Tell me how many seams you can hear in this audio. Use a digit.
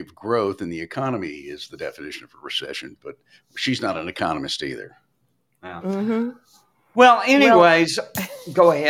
0